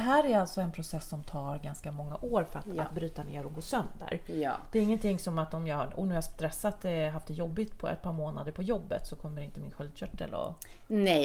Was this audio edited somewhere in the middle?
no; 0 cuts

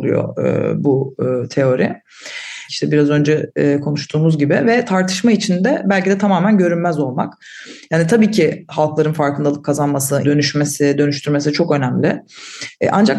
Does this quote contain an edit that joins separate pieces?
yes; 2 cuts; at 2.7 s, 10.2 s

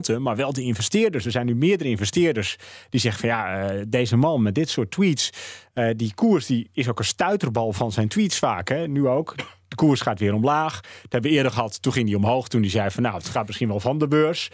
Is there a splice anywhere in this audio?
no; 0 cuts

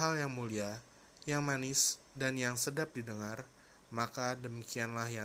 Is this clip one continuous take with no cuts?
no; 1 cut; at 1.2 s

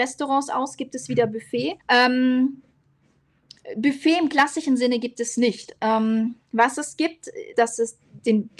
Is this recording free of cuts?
no; 2 cuts; at 1.8 s, 7.5 s

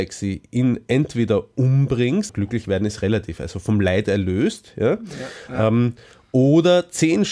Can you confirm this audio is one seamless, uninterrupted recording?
no; 1 cut; at 2.3 s

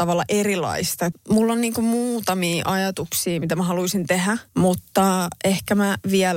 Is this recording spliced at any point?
yes; 2 cuts; at 1.1 s, 4.5 s

